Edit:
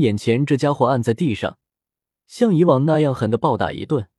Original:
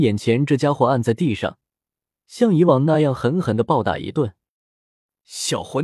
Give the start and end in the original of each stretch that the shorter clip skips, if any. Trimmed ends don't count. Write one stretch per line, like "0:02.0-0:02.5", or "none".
0:03.2-0:03.4